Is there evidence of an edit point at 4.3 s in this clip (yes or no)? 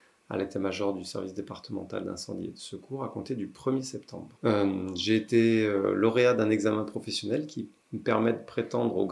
yes